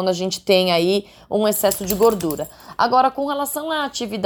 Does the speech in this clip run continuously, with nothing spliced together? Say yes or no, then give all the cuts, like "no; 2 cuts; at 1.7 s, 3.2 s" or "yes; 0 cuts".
yes; 0 cuts